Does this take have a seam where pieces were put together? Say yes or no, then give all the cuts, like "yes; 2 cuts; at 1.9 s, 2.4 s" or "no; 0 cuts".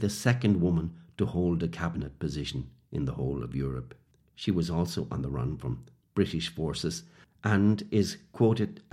no; 0 cuts